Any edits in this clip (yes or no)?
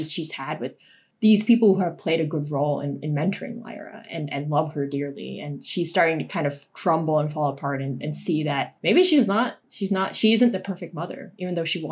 no